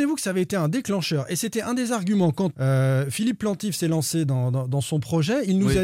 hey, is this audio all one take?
no; 1 cut; at 2.5 s

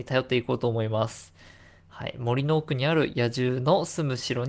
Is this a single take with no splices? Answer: yes; 0 cuts

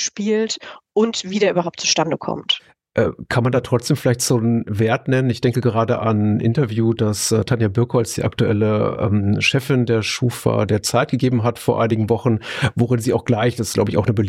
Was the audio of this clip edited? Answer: no; 0 cuts

